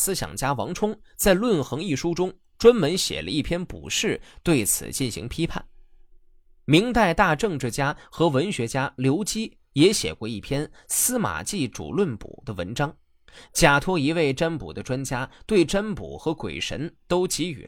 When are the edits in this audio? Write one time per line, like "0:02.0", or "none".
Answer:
none